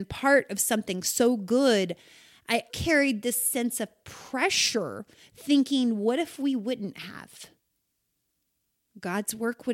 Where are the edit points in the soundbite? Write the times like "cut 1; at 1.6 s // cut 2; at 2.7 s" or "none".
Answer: cut 1; at 2.7 s